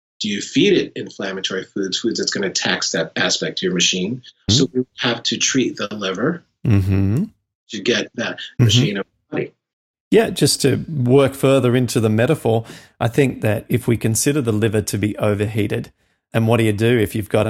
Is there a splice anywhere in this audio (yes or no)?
yes